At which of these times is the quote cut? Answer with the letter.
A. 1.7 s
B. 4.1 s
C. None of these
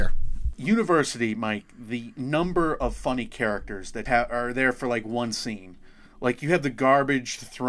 B